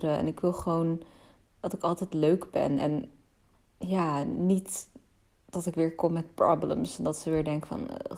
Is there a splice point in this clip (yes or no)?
no